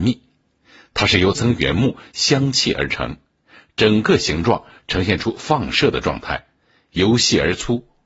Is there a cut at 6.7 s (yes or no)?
no